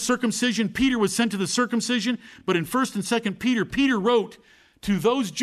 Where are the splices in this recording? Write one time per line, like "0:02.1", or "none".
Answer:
none